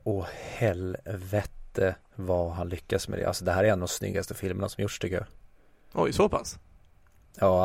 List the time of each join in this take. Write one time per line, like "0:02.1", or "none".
none